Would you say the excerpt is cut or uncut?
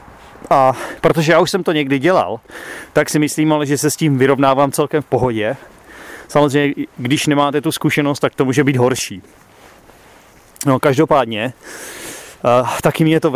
uncut